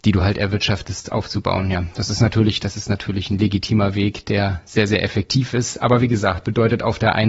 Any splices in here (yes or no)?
no